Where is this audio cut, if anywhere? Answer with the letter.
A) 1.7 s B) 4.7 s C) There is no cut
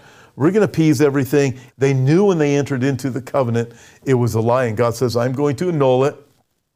A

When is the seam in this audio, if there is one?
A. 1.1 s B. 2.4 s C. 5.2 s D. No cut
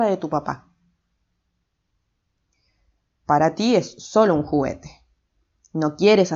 D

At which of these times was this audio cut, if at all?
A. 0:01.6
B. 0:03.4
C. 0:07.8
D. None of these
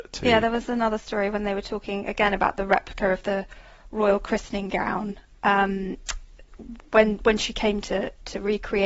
D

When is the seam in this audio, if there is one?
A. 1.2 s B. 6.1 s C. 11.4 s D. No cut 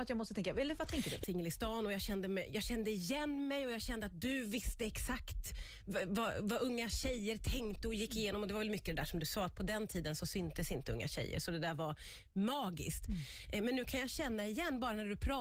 A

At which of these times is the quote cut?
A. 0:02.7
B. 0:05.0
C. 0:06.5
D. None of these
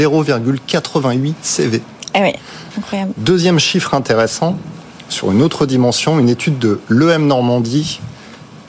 A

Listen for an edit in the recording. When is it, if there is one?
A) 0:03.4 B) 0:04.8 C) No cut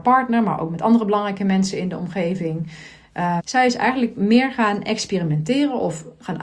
A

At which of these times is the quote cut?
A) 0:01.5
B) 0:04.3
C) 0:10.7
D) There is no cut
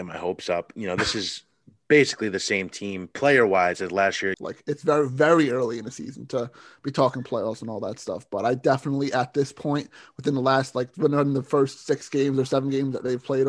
B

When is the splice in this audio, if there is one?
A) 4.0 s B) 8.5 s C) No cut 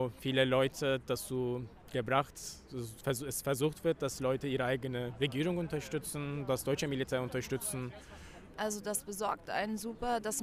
B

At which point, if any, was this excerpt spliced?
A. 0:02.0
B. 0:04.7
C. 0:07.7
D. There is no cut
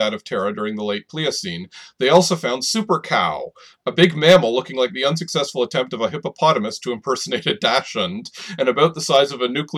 D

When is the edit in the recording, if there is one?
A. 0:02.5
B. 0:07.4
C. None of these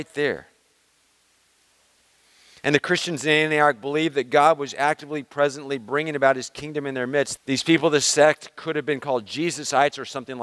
B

